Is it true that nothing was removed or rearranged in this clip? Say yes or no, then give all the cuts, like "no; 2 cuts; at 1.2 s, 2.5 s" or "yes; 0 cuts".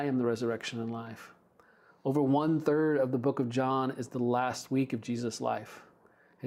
yes; 0 cuts